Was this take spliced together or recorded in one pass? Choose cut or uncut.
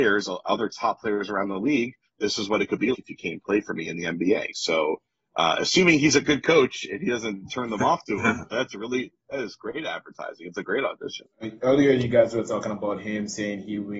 cut